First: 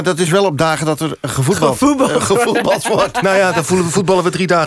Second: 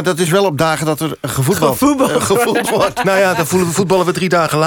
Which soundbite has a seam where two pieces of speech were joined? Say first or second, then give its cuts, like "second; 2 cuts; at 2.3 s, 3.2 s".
second; 1 cut; at 2.6 s